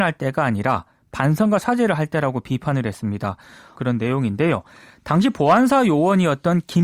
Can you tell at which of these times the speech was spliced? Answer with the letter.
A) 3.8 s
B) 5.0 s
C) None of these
A